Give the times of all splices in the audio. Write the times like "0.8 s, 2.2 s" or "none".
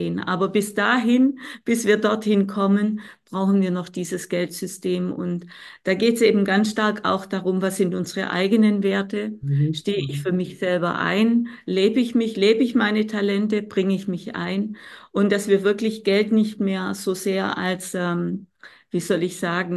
none

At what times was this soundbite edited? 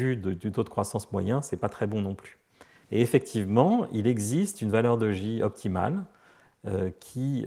none

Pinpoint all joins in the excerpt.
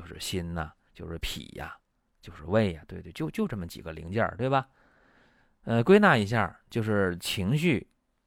none

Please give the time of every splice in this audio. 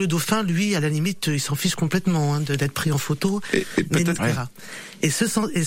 4.2 s

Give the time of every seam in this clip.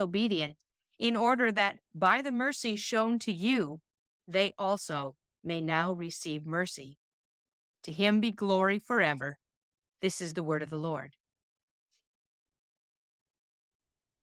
7.7 s, 9.8 s

